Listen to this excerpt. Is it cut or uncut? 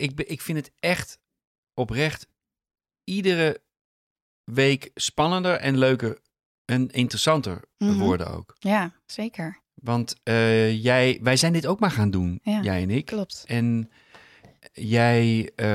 uncut